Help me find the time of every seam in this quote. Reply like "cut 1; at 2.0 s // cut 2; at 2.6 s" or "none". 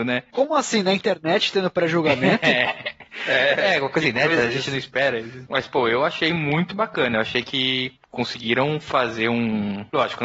none